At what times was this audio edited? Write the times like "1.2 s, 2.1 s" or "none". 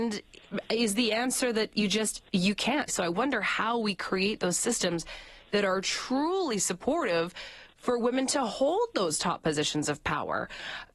2.9 s